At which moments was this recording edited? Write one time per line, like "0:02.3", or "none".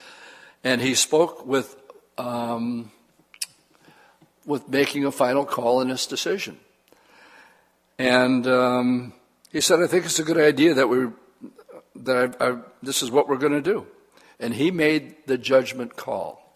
none